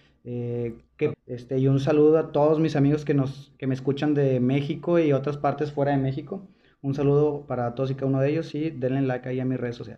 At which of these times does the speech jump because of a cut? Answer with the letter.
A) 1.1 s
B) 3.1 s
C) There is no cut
A